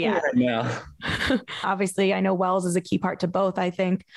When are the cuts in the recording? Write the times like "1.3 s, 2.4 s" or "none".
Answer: 1.6 s